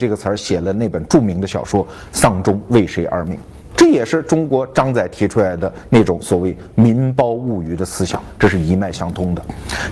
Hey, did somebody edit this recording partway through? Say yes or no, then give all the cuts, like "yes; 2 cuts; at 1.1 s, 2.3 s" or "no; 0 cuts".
no; 0 cuts